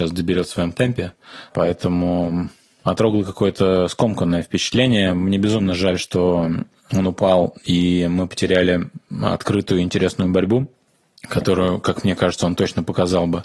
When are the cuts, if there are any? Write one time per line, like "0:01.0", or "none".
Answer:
0:01.5